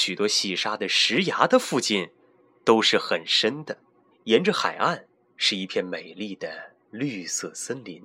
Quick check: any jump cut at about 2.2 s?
no; 1 cut; at 4.1 s

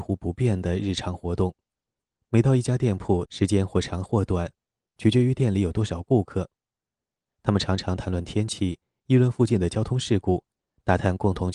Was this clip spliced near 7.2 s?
no; 1 cut; at 3.3 s

